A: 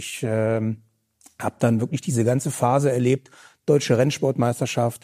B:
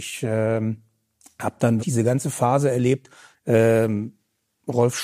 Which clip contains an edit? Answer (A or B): B